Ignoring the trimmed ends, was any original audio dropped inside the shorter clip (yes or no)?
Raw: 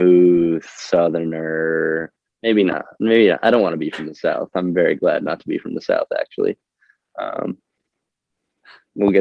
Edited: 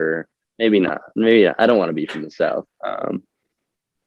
yes